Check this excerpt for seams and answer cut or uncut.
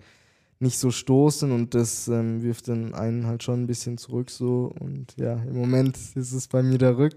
uncut